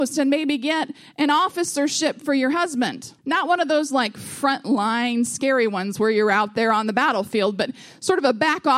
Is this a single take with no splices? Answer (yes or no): no